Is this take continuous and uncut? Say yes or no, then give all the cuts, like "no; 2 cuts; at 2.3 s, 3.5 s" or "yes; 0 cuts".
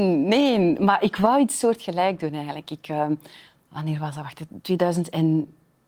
yes; 0 cuts